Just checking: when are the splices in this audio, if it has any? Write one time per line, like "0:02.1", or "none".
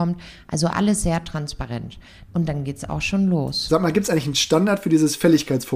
0:02.3

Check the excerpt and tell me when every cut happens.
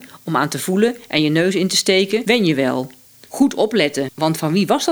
0:03.2

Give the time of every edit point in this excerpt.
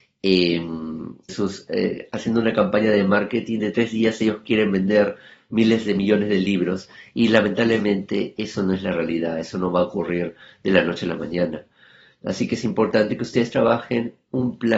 0:01.3

